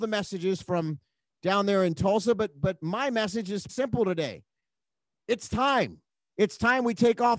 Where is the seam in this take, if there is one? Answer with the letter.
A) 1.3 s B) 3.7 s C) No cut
B